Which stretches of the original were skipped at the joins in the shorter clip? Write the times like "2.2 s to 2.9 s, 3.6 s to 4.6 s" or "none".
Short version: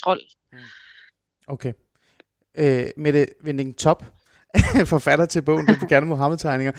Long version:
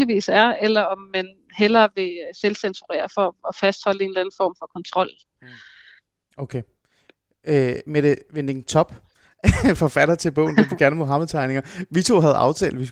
none